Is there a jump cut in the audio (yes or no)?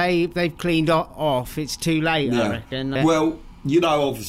yes